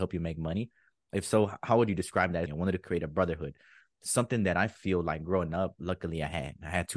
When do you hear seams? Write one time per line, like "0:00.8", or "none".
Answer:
0:02.5